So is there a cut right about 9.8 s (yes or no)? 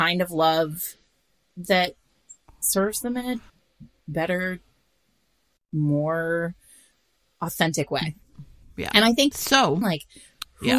yes